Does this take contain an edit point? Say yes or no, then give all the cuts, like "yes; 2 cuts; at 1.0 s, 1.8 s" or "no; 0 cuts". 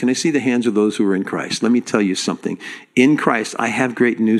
no; 0 cuts